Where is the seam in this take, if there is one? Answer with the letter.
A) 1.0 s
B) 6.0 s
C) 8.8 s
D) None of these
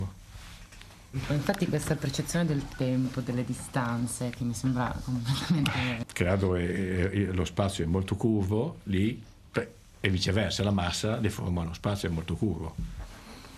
B